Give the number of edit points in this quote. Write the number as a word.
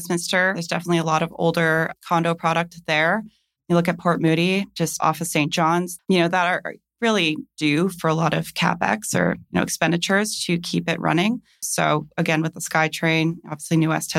two